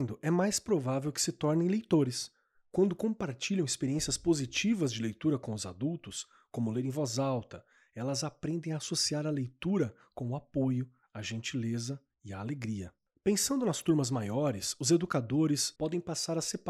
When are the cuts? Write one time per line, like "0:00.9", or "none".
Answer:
0:15.8